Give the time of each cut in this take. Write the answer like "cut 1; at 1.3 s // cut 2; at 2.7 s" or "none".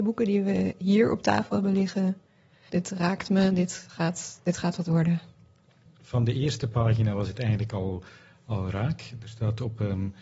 cut 1; at 2.7 s // cut 2; at 5.9 s